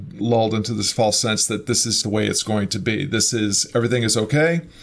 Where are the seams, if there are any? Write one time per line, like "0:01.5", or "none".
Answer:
0:02.0